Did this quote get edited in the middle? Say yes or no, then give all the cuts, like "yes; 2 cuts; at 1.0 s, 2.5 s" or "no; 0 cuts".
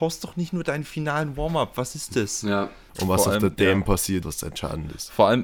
yes; 2 cuts; at 2.9 s, 4.2 s